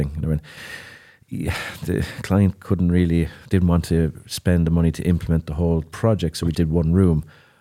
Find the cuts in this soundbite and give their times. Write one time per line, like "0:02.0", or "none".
0:06.5